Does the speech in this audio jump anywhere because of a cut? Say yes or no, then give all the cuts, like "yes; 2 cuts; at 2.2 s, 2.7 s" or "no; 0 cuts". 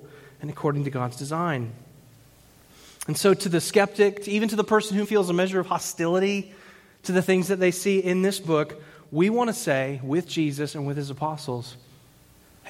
yes; 1 cut; at 5.0 s